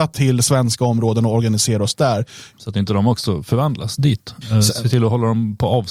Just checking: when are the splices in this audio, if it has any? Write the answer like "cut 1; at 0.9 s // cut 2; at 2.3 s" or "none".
cut 1; at 2.5 s // cut 2; at 4.4 s